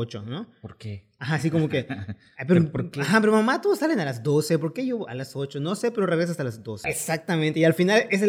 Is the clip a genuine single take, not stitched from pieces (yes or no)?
no